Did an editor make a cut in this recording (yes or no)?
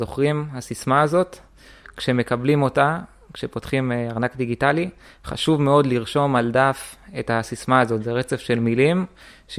no